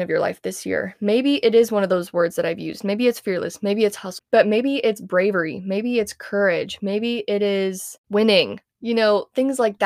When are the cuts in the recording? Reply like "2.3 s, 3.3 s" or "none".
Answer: 4.2 s

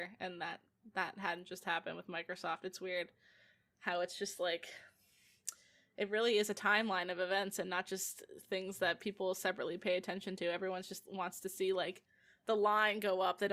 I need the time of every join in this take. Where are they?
none

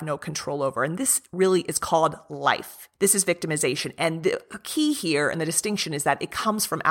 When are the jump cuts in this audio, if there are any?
2.9 s

